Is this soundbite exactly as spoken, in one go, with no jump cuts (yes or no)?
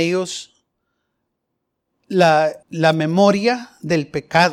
no